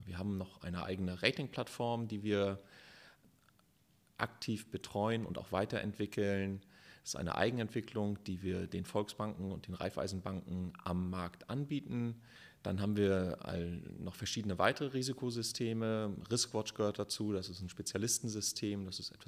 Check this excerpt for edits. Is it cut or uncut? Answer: uncut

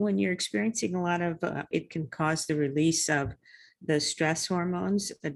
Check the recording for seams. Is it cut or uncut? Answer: cut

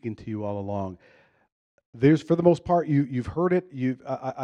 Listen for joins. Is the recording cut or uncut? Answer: uncut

